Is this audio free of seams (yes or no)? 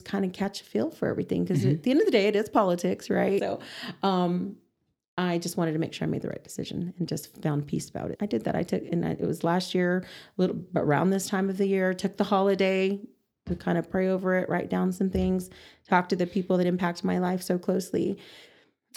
no